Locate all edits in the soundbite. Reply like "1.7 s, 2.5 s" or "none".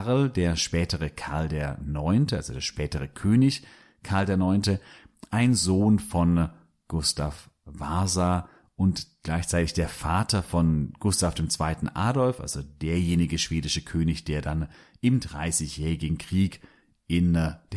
none